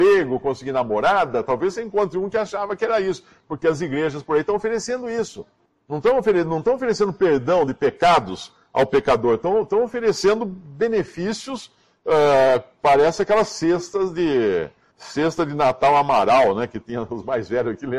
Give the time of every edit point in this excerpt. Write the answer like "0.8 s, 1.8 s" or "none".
none